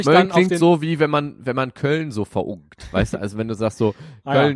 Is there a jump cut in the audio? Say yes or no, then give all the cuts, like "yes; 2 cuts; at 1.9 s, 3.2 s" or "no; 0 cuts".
no; 0 cuts